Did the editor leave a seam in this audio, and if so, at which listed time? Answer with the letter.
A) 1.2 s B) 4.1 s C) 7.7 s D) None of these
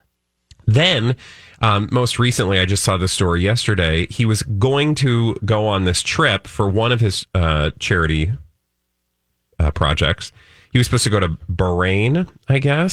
D